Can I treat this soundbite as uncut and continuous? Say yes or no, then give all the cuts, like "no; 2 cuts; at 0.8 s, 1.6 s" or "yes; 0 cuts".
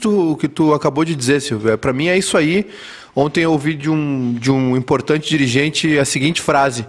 yes; 0 cuts